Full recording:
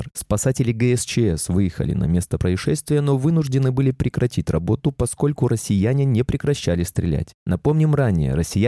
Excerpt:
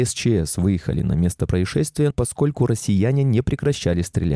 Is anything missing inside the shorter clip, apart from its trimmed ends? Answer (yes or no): yes